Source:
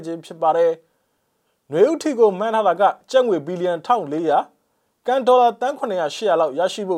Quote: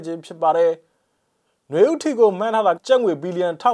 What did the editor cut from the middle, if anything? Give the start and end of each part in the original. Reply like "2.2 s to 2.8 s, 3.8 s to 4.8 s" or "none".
2.8 s to 3.0 s